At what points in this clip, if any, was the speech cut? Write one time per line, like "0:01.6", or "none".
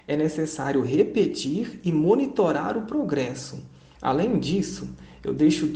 0:03.9